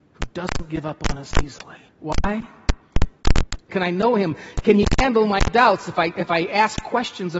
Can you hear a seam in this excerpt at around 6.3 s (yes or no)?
no